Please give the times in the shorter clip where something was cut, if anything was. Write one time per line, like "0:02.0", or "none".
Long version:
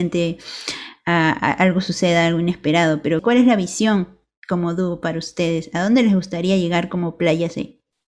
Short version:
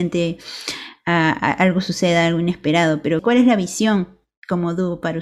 none